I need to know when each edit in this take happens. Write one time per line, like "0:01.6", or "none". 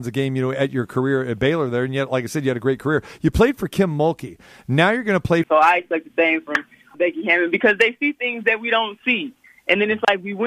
0:05.4
0:06.9